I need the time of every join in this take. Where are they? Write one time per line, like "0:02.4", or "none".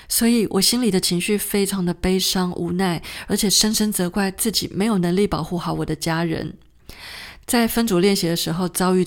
0:07.4